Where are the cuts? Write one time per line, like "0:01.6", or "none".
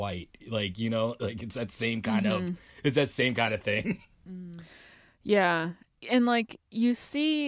none